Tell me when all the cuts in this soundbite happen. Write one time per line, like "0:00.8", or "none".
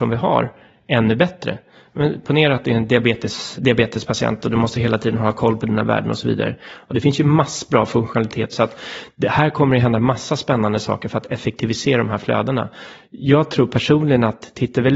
0:03.6
0:08.5